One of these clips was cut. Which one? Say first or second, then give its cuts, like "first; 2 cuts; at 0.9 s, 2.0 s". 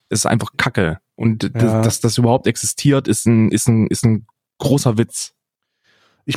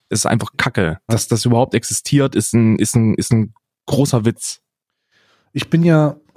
second; 1 cut; at 1.1 s